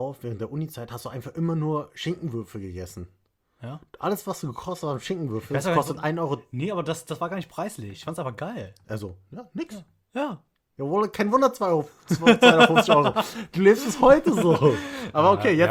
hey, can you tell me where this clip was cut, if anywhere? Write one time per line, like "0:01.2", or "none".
0:08.8